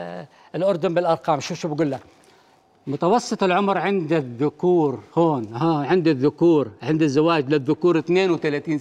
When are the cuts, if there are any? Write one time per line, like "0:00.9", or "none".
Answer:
none